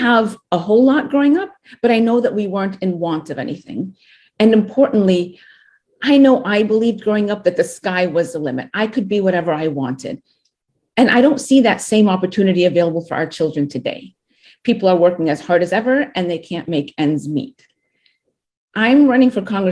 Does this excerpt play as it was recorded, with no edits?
yes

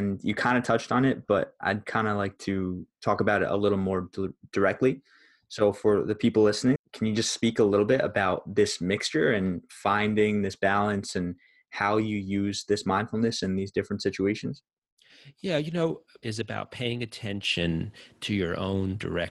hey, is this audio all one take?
no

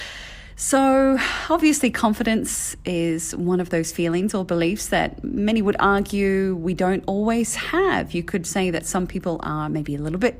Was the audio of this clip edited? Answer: no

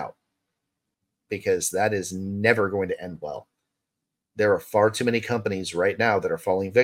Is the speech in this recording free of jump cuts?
yes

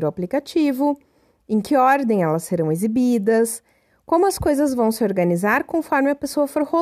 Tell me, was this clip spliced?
no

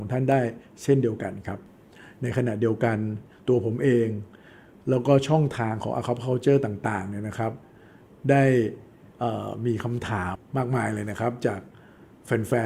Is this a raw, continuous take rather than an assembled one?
no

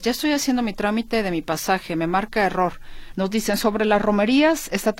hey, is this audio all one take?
no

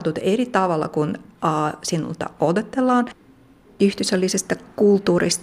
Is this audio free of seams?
yes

